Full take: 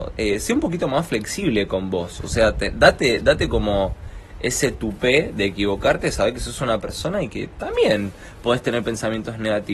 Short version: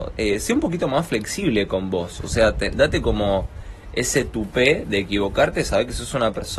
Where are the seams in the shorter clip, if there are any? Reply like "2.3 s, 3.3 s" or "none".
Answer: 2.7 s